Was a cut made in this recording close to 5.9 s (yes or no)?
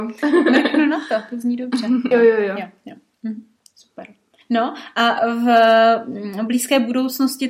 no